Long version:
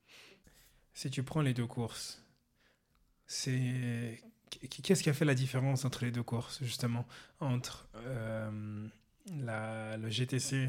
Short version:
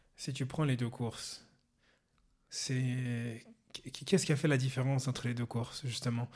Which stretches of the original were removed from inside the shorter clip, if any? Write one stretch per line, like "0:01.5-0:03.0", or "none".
none